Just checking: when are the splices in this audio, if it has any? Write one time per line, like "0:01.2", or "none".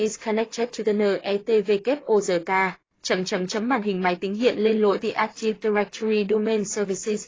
none